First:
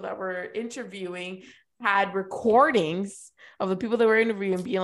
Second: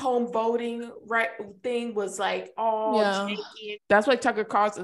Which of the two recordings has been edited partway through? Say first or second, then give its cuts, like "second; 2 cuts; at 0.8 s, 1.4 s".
second; 1 cut; at 3.7 s